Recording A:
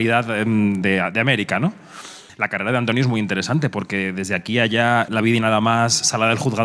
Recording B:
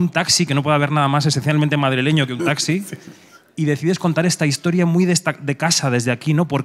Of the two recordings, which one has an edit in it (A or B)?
A